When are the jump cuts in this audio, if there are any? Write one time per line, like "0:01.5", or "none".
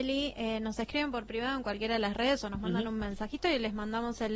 none